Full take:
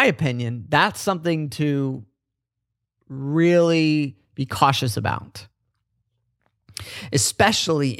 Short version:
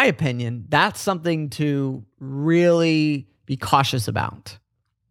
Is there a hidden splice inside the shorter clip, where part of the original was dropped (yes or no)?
yes